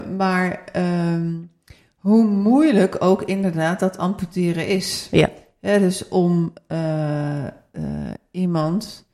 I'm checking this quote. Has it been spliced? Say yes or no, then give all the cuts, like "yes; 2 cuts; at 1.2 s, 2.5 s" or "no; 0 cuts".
no; 0 cuts